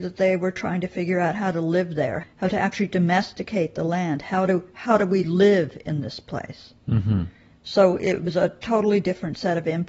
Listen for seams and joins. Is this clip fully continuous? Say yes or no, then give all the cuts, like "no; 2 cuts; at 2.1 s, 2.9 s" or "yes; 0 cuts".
no; 1 cut; at 2.2 s